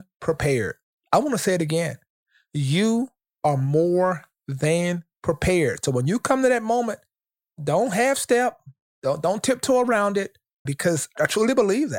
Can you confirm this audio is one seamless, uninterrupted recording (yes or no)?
no